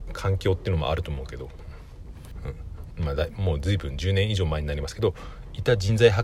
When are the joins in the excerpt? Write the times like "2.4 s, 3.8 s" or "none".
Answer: 2.9 s